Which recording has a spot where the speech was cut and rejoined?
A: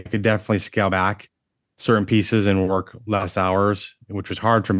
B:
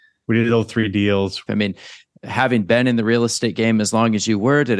B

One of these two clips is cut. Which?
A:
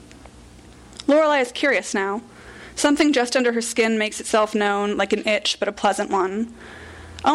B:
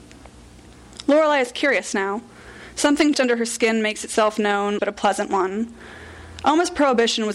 B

